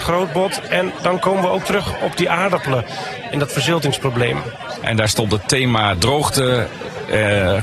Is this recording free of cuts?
no; 1 cut; at 4.8 s

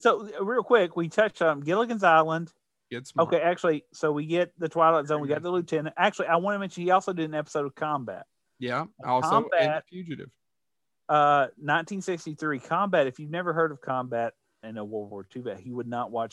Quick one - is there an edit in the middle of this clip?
yes; 1 cut; at 14.6 s

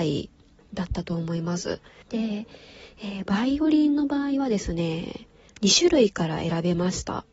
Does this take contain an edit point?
yes; 1 cut; at 2.0 s

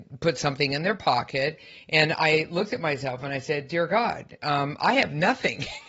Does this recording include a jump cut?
no; 0 cuts

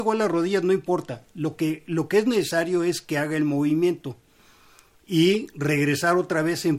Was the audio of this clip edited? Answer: no; 0 cuts

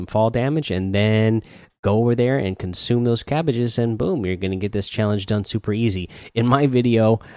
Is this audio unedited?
yes; 0 cuts

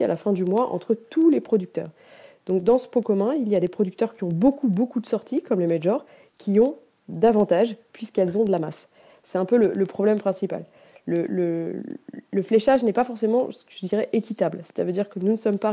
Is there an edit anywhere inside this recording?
no; 0 cuts

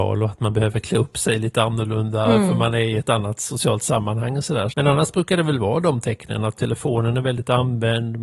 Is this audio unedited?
no; 1 cut; at 4.7 s

